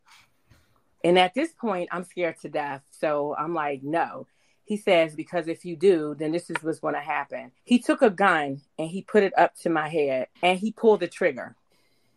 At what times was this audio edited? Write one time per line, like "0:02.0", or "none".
0:05.2
0:07.6
0:10.3